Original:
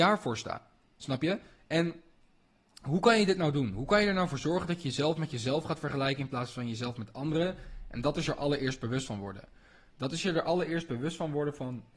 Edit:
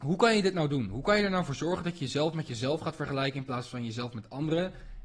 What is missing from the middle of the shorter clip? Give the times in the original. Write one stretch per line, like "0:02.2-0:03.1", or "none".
none